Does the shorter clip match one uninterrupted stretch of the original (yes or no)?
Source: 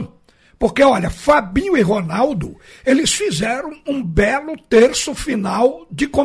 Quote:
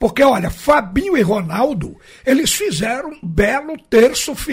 no